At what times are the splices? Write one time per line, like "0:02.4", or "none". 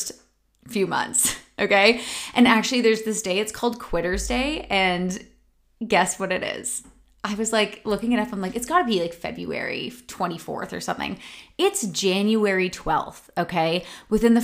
none